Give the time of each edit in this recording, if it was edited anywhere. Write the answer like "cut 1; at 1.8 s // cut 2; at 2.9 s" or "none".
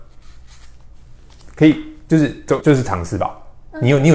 cut 1; at 2.6 s